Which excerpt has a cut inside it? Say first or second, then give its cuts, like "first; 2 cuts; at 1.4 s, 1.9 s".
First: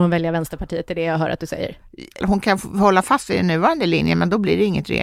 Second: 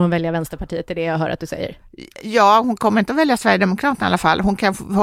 first; 1 cut; at 2.2 s